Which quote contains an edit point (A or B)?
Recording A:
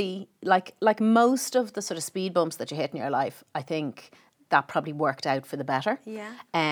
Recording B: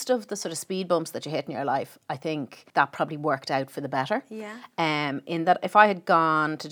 B